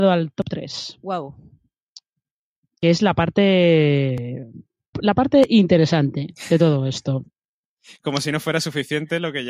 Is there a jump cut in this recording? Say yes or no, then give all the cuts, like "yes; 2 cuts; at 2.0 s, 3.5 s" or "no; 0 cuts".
yes; 1 cut; at 4.9 s